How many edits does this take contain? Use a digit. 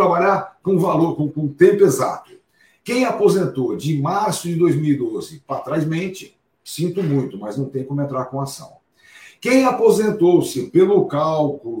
1